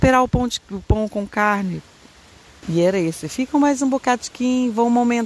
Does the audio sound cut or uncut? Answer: cut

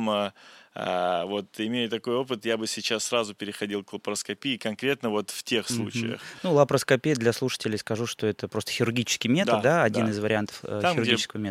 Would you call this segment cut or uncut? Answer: uncut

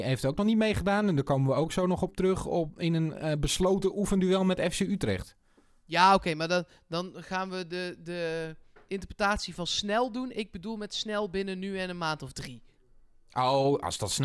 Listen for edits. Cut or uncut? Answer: uncut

